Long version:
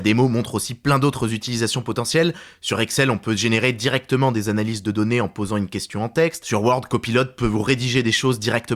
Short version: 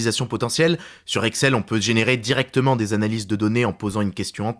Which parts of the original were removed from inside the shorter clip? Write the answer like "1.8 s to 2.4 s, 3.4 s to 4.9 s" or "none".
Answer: none